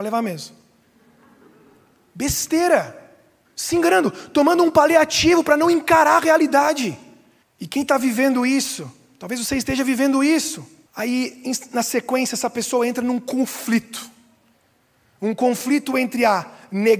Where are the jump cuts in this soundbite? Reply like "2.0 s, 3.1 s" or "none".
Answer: 3.4 s, 7.4 s, 10.9 s